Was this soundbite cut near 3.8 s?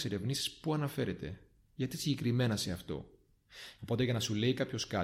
yes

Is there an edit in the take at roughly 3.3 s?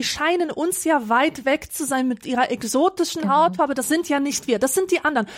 no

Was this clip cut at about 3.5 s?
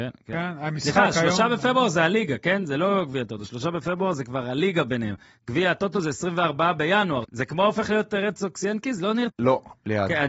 no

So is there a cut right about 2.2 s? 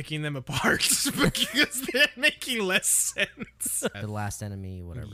no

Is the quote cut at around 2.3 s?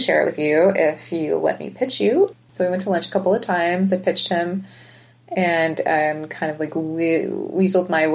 yes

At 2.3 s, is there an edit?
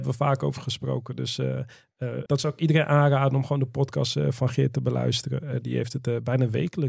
yes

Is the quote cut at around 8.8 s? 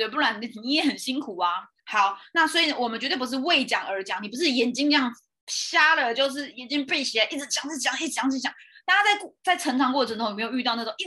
no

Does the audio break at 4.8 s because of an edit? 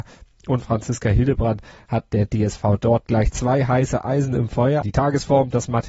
yes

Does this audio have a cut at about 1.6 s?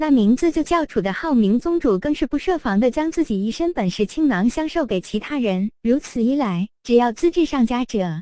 yes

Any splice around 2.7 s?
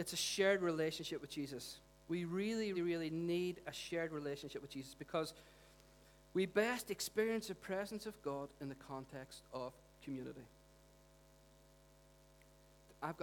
yes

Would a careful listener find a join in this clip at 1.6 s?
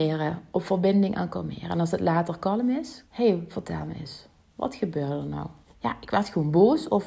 no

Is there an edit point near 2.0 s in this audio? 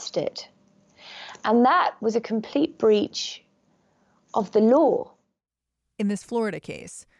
yes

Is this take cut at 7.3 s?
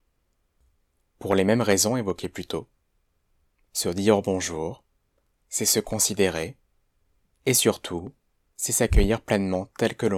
yes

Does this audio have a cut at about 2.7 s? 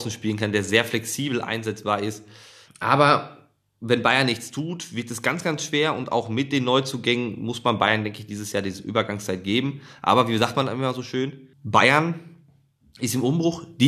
yes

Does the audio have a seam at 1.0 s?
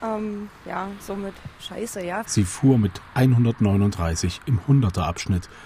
no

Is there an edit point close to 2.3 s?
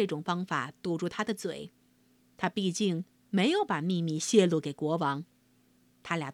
no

